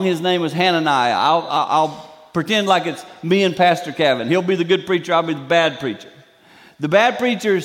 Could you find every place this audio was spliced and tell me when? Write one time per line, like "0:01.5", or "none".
none